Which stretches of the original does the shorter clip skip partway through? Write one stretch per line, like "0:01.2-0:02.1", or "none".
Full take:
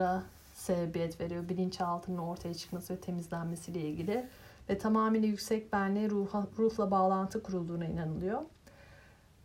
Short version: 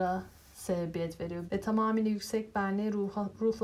0:01.5-0:04.6